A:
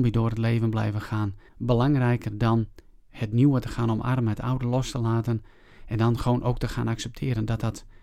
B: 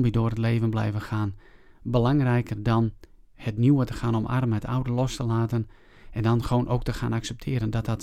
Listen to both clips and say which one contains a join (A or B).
A